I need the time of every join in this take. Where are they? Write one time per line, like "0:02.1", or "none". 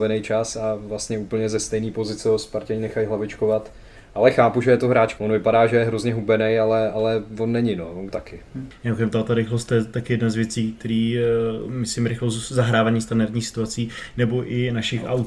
0:05.2
0:08.1
0:10.8